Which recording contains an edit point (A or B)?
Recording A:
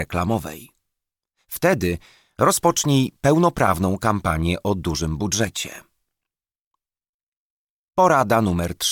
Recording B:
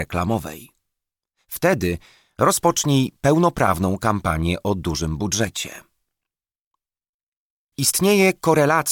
B